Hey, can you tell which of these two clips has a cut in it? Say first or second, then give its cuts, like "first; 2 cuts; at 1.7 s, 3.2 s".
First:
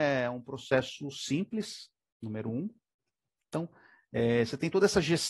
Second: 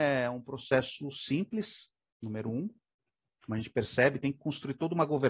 first; 1 cut; at 3.4 s